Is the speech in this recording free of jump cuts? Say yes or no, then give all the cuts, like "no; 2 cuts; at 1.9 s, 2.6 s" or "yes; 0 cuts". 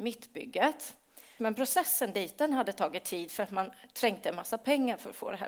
no; 1 cut; at 1.4 s